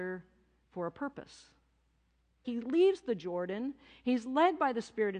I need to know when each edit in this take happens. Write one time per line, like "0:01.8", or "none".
0:02.4